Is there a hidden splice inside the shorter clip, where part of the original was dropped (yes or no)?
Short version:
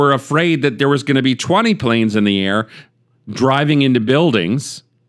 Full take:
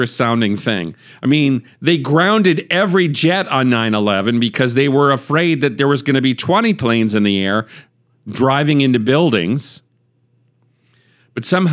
no